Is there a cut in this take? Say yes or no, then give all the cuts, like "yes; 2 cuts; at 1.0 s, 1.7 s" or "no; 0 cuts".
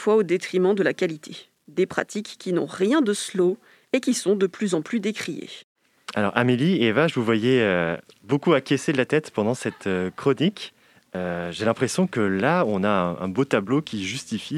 no; 0 cuts